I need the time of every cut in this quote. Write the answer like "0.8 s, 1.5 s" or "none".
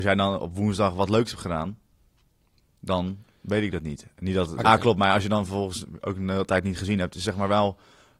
4.6 s